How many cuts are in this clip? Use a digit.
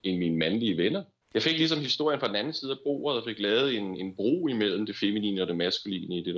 1